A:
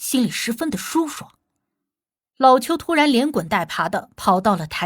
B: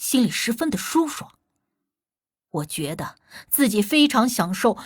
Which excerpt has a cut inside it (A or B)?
A